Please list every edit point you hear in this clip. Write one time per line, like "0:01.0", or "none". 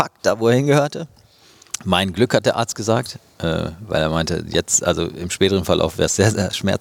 none